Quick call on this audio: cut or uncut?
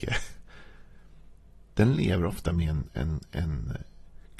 uncut